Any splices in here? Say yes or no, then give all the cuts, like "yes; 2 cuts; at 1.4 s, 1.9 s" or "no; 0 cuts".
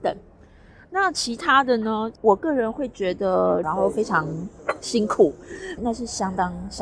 yes; 2 cuts; at 3.6 s, 5.8 s